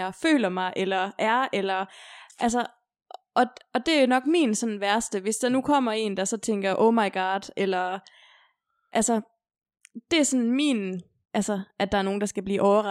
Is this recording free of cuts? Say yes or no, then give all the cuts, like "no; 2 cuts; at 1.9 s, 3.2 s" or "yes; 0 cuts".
no; 1 cut; at 11.2 s